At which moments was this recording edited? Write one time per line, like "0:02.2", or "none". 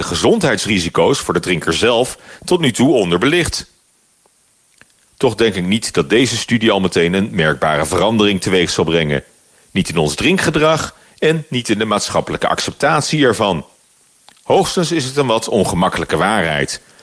none